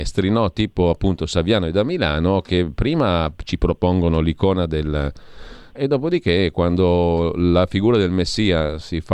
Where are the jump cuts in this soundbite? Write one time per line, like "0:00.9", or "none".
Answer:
0:05.7